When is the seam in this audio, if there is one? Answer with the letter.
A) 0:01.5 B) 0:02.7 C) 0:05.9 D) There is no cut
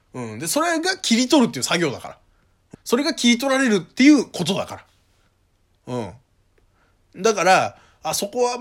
B